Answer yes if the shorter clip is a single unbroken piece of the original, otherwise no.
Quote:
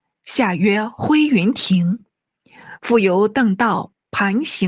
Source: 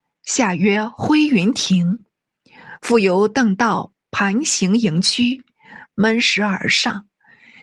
yes